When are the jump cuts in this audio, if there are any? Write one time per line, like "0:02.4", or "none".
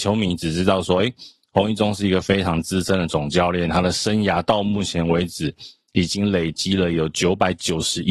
none